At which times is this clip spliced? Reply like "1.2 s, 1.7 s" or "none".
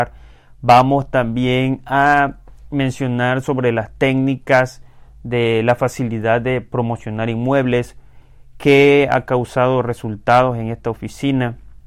none